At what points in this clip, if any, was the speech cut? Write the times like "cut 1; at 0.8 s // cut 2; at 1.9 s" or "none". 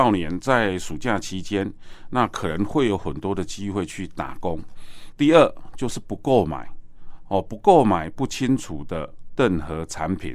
cut 1; at 5.1 s